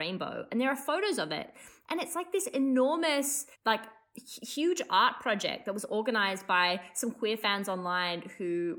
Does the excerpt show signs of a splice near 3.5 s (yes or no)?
yes